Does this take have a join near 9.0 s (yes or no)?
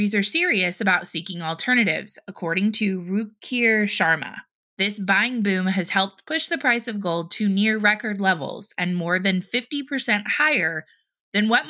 no